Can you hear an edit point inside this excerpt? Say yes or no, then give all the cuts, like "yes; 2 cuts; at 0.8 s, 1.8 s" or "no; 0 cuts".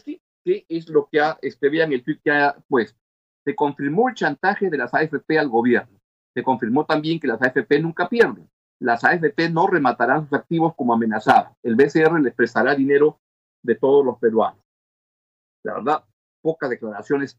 no; 0 cuts